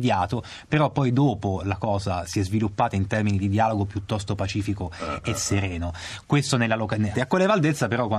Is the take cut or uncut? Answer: cut